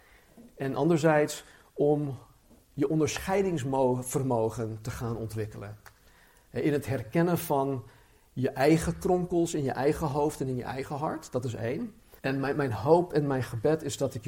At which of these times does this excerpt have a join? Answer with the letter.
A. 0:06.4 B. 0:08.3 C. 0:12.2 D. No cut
C